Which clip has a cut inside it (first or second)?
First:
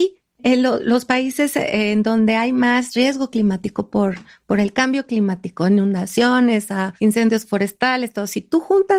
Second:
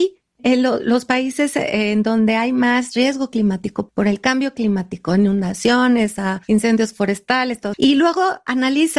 second